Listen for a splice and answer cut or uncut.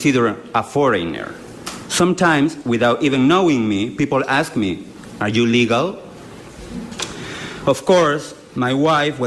uncut